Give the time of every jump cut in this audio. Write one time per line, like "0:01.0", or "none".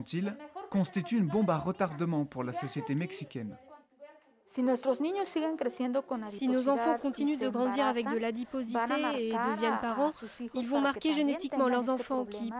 none